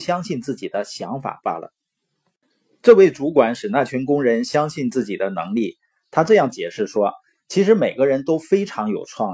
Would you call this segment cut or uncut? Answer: uncut